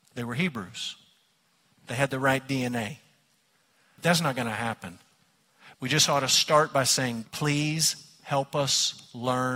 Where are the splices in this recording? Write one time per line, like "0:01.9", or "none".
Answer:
0:04.0
0:05.7
0:07.2